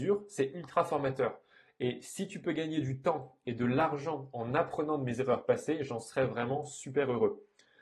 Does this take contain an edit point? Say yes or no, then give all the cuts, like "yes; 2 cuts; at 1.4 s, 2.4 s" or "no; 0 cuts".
no; 0 cuts